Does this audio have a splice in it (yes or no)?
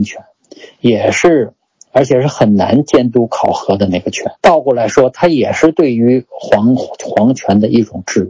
yes